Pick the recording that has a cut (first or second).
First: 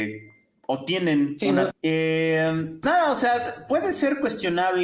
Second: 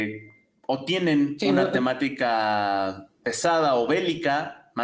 first